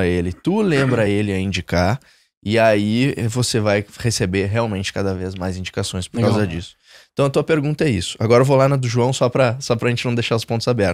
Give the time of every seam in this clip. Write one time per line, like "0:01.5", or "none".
none